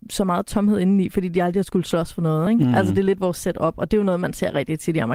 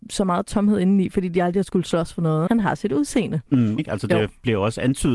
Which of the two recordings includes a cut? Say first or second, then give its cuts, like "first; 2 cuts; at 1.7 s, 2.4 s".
second; 2 cuts; at 2.5 s, 3.8 s